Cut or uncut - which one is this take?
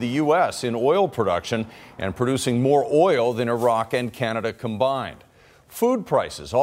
uncut